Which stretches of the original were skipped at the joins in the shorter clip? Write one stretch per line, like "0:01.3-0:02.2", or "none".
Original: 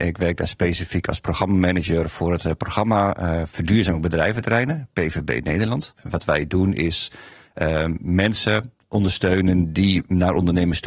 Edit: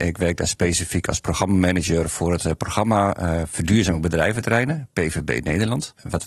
none